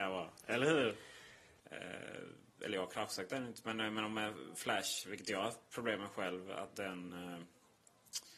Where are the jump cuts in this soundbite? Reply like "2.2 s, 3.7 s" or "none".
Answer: 1.6 s